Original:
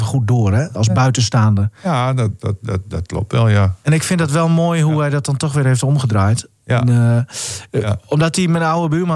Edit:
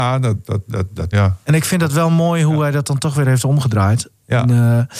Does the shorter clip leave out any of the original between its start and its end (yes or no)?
yes